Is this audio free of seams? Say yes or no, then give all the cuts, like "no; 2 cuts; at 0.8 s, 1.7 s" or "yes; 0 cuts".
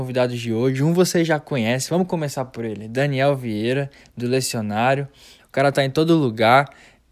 no; 1 cut; at 5.4 s